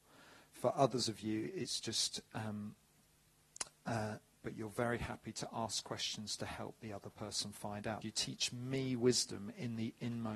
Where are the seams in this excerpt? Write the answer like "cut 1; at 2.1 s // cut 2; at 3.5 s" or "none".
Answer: cut 1; at 4.3 s // cut 2; at 8.0 s